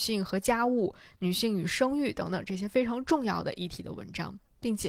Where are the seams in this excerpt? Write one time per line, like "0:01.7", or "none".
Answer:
none